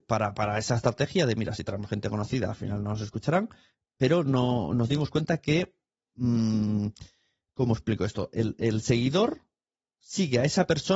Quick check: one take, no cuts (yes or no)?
yes